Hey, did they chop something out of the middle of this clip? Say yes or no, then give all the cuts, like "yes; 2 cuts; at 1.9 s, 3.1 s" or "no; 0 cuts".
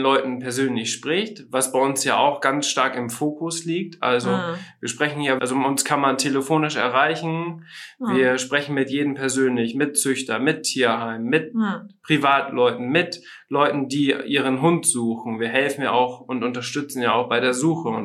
yes; 1 cut; at 5.4 s